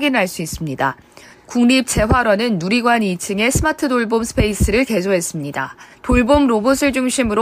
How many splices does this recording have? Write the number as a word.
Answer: two